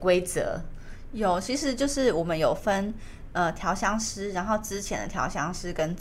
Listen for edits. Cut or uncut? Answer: uncut